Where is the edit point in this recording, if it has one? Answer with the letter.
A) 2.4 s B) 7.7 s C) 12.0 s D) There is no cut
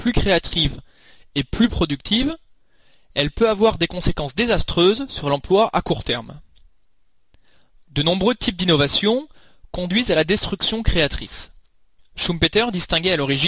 C